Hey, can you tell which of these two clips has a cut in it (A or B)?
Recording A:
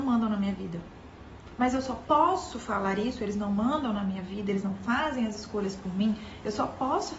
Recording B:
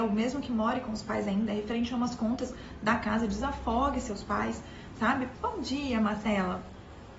B